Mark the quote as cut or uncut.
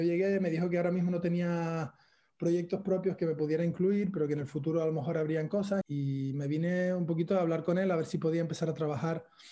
cut